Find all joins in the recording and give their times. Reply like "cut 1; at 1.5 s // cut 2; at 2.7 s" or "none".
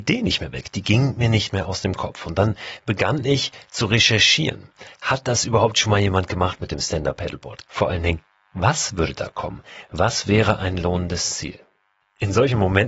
cut 1; at 7.7 s